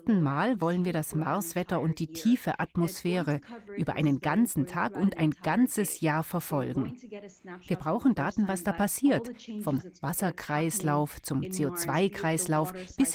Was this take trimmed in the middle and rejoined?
no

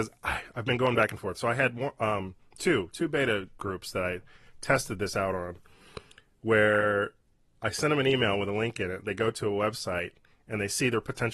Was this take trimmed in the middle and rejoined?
no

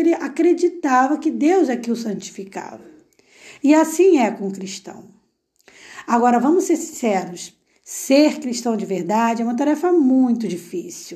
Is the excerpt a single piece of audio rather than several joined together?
yes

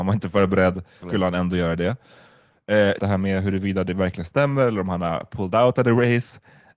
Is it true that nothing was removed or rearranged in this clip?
no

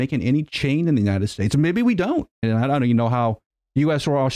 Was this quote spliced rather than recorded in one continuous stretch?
yes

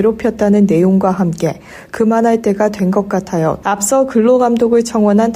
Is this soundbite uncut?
no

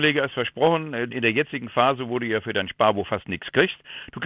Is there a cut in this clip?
yes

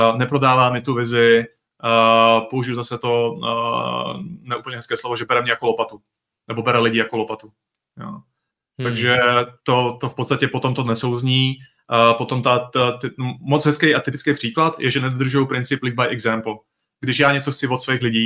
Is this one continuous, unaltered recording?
yes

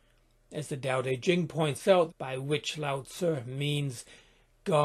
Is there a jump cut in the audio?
yes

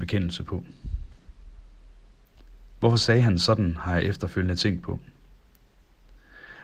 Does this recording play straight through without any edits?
yes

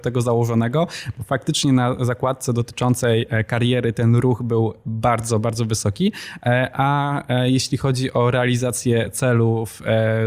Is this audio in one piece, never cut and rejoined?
yes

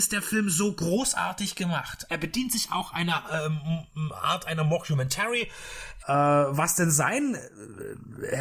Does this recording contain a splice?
yes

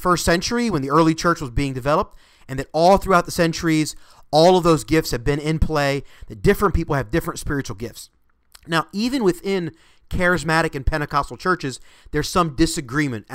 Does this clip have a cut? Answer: no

